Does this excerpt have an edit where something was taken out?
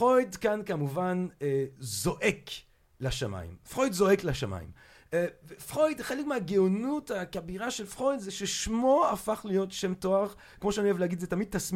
no; 0 cuts

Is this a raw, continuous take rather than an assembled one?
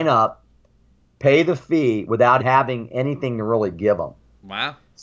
no; 1 cut; at 2.4 s

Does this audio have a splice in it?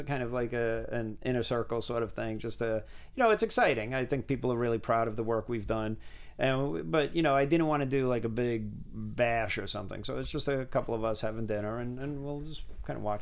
no; 0 cuts

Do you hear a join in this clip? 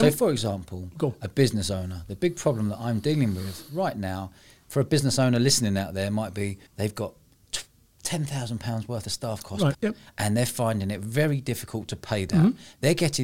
yes; 2 cuts; at 6.7 s, 9.7 s

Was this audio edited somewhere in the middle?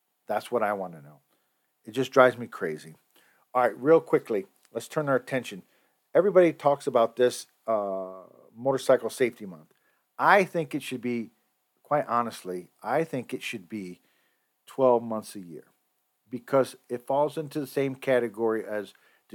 no; 0 cuts

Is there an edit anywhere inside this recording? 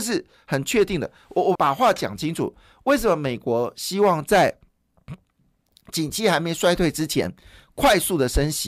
yes; 1 cut; at 1.6 s

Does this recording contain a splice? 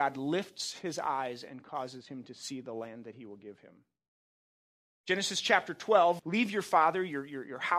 yes; 2 cuts; at 4.9 s, 6.2 s

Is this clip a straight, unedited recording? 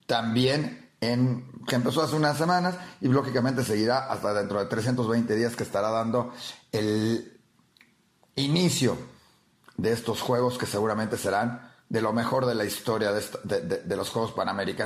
yes; 0 cuts

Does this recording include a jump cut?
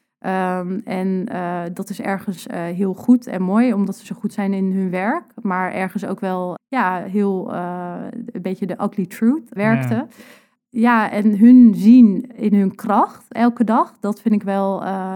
yes; 2 cuts; at 6.6 s, 9.6 s

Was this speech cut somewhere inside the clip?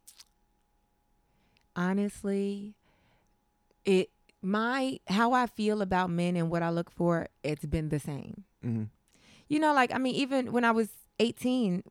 no; 0 cuts

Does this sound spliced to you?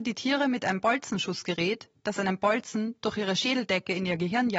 no; 0 cuts

